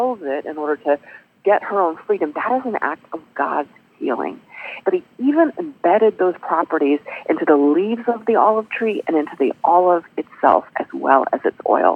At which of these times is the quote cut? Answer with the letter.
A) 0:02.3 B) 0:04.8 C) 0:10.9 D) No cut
B